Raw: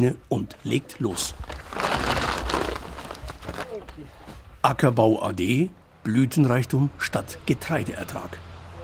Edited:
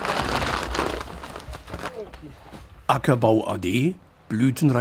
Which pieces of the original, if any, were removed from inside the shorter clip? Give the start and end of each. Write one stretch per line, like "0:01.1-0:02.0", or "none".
none